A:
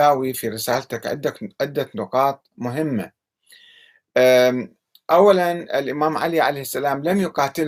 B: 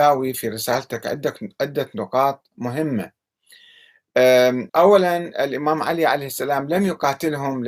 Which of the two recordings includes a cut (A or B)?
B